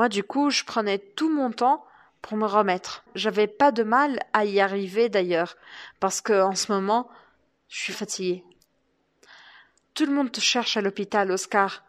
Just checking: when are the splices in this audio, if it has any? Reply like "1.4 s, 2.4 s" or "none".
7.9 s